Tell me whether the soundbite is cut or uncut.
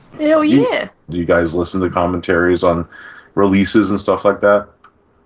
cut